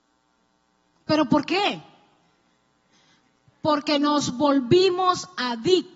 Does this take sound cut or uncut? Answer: uncut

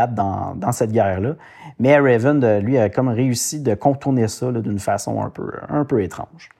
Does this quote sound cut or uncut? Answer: uncut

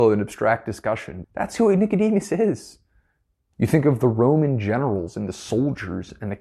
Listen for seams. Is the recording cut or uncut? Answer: cut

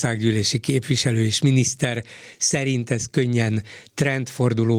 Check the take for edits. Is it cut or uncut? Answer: uncut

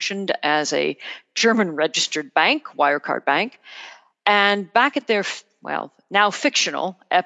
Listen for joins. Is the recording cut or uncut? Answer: uncut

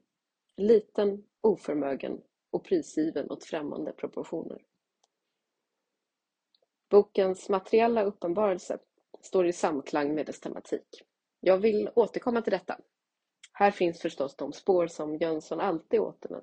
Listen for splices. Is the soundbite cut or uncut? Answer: cut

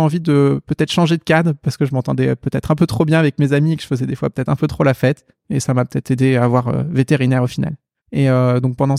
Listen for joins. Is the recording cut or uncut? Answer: cut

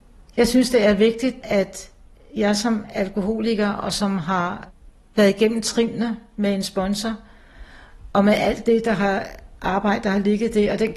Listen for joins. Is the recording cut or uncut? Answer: uncut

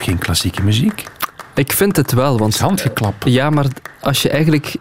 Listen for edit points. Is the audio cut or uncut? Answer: uncut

